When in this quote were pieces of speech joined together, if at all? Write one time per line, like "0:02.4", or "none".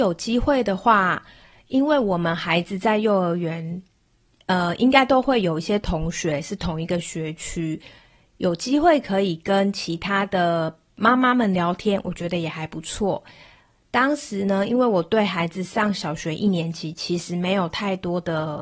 none